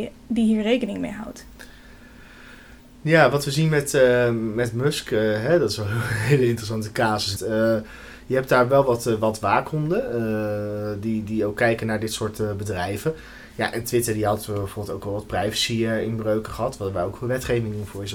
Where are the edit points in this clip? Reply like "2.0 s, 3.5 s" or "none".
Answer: 7.4 s